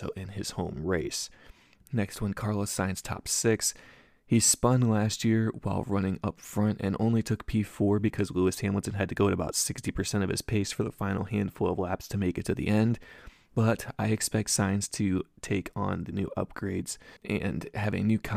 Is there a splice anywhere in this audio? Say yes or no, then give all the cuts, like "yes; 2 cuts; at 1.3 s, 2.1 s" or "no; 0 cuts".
yes; 1 cut; at 17.2 s